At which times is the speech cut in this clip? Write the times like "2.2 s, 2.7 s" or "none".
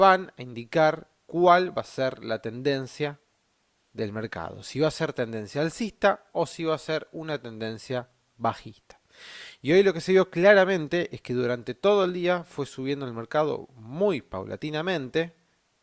none